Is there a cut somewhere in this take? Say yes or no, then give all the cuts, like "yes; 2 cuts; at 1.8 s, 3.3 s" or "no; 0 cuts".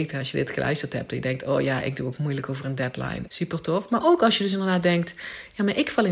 yes; 1 cut; at 3.3 s